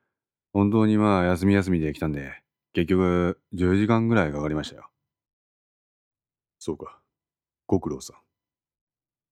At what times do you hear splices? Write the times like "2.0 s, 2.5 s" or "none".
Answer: none